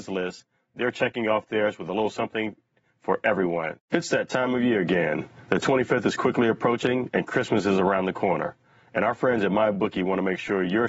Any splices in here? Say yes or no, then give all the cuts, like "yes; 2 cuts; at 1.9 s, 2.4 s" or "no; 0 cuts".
yes; 1 cut; at 3.9 s